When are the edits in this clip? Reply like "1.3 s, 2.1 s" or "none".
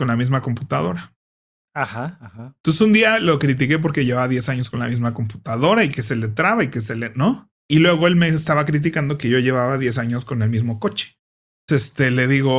11.7 s